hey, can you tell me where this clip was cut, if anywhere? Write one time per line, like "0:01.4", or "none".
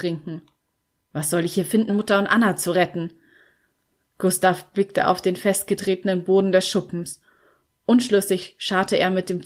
0:01.9